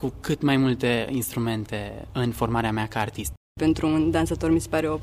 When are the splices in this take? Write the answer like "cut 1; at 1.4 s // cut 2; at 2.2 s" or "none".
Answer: none

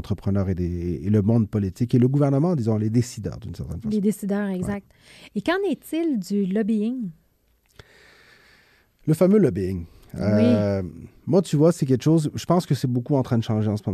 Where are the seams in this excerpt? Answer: none

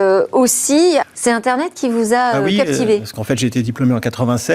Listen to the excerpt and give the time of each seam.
cut 1; at 1.0 s

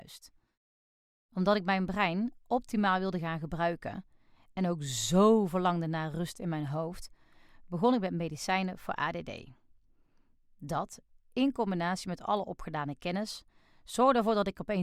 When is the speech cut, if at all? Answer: none

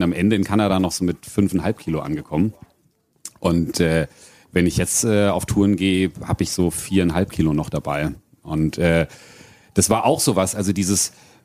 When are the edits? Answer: none

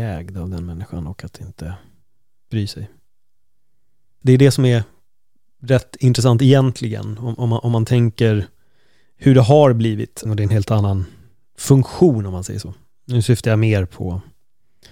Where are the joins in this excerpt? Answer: cut 1; at 4.2 s // cut 2; at 10.3 s

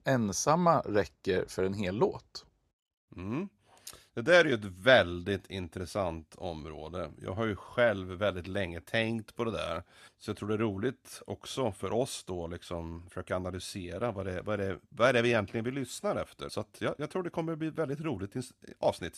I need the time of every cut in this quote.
cut 1; at 10.1 s // cut 2; at 16.5 s

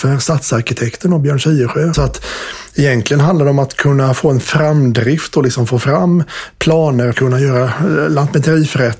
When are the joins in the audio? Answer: cut 1; at 1.9 s // cut 2; at 7.1 s

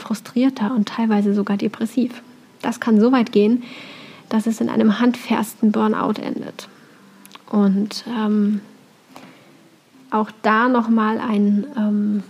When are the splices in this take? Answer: none

